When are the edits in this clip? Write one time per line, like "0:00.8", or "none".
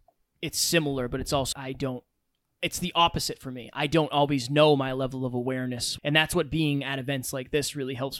0:01.5
0:06.0